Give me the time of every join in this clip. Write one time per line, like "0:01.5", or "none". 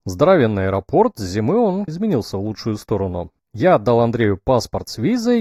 0:01.9
0:03.4